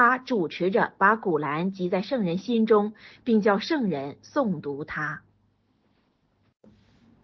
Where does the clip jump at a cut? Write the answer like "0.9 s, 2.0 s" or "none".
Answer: none